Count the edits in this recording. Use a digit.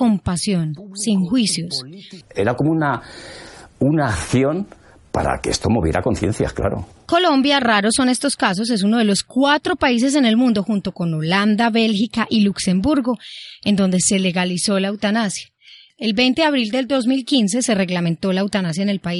1